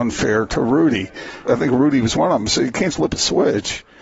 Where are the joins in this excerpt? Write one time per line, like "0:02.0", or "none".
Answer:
0:01.4
0:02.9